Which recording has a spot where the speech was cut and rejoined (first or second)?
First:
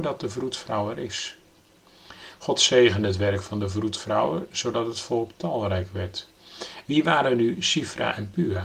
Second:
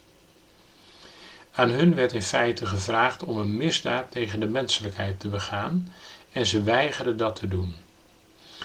first